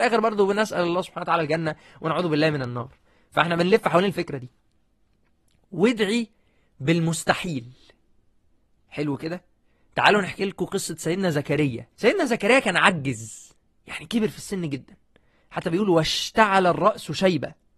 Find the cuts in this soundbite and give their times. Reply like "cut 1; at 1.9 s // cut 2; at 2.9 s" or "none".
cut 1; at 11.9 s